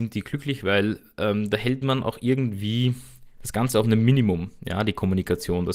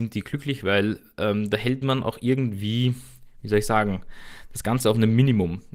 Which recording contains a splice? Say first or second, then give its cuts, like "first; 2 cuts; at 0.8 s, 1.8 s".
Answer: first; 1 cut; at 3.4 s